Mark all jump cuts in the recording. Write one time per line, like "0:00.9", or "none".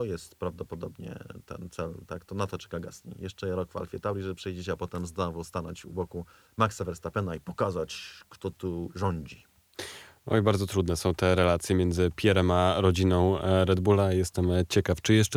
none